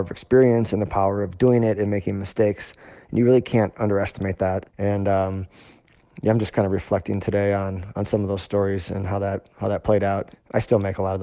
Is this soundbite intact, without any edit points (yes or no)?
no